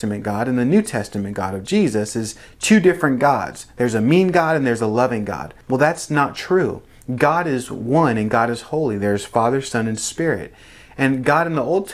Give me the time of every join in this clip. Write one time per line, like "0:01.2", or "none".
0:05.6